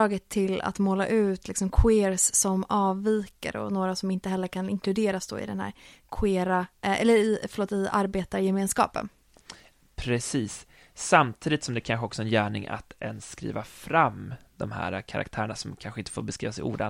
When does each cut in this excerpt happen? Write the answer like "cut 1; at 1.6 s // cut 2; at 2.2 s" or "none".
none